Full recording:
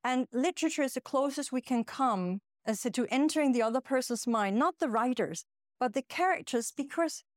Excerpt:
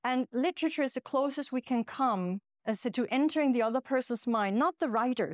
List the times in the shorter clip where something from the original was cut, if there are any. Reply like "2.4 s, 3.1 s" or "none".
none